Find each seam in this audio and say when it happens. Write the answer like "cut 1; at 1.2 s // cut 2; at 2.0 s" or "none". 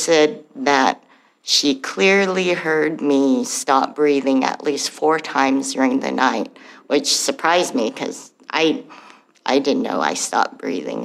none